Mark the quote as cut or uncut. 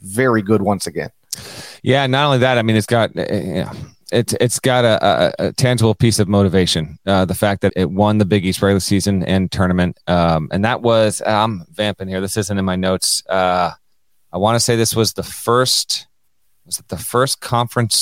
cut